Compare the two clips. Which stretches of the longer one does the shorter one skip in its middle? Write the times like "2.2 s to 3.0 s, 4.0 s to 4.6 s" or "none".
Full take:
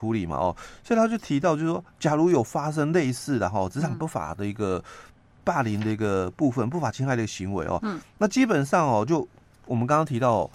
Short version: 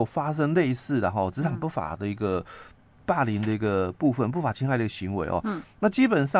none